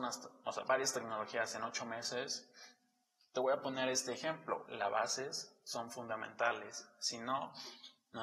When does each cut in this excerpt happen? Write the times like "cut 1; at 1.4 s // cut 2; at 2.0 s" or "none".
cut 1; at 4.7 s